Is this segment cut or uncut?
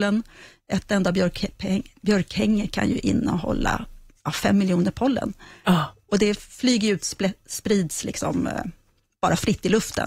uncut